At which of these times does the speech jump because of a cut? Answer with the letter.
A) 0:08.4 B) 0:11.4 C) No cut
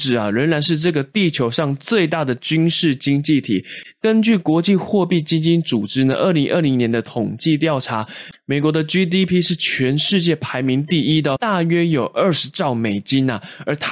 B